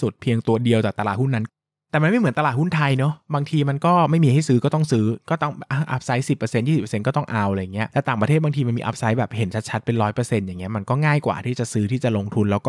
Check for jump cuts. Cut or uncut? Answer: uncut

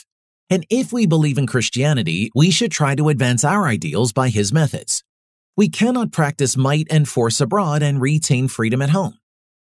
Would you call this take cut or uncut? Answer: uncut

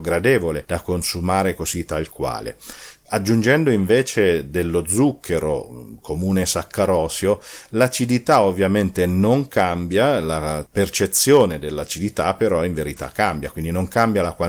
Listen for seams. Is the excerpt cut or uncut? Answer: uncut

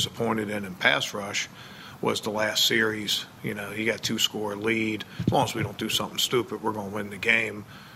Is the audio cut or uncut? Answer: uncut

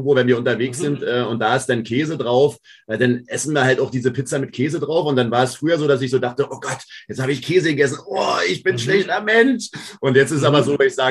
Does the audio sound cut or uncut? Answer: uncut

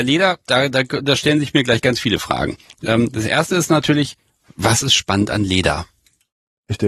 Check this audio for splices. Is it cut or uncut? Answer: uncut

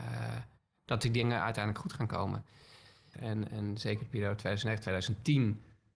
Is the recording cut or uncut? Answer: cut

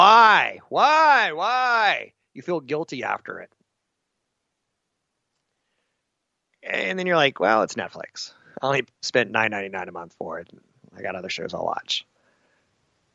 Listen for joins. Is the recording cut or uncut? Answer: uncut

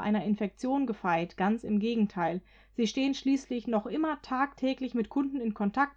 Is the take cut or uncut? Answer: uncut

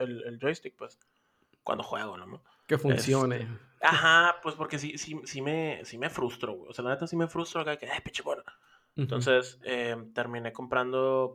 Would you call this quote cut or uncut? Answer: uncut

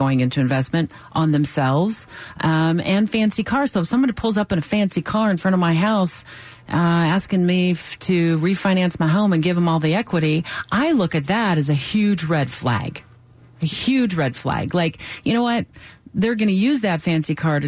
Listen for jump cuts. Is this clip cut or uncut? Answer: uncut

